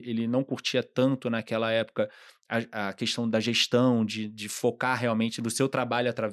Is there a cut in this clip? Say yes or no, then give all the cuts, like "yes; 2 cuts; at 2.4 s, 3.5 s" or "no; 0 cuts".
no; 0 cuts